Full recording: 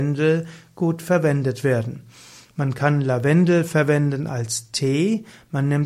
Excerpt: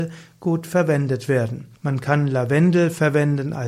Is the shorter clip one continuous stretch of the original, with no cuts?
no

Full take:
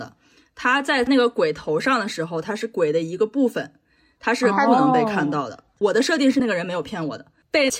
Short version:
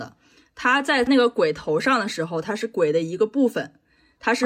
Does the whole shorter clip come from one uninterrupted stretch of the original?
yes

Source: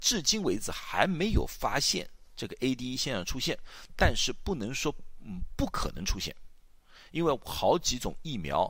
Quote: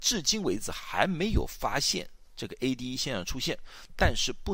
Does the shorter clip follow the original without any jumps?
yes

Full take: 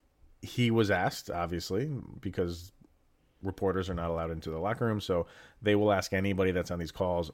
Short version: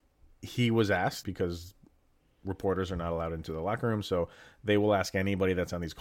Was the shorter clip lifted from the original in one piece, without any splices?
no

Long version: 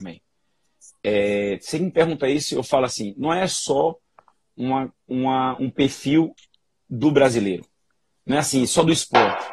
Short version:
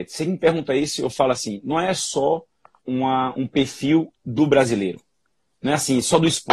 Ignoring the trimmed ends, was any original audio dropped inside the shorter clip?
yes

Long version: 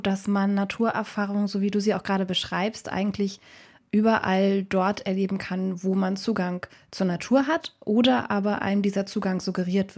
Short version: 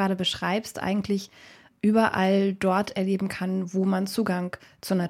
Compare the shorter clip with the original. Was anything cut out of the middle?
no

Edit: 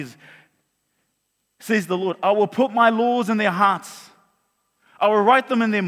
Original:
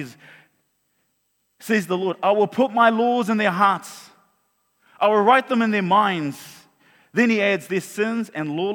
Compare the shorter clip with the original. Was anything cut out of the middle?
no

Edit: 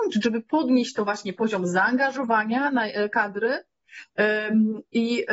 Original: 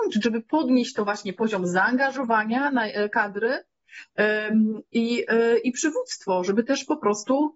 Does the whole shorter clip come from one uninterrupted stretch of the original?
yes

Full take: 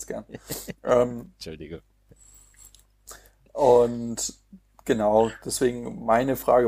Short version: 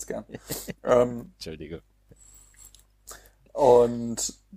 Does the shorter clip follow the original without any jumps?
yes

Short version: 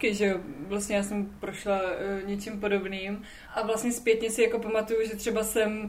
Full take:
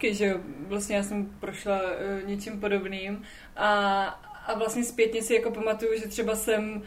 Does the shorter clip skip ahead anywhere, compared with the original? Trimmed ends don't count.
yes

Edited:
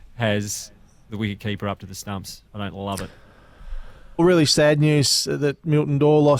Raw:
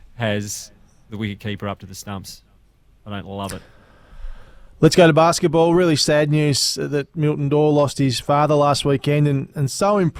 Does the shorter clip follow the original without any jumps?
no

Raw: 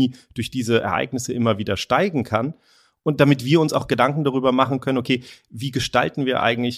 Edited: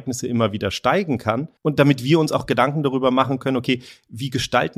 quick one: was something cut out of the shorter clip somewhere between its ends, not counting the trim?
yes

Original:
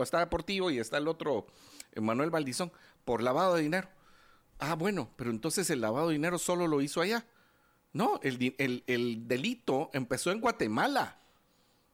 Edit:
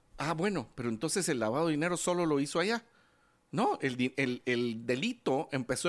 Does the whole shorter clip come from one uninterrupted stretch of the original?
yes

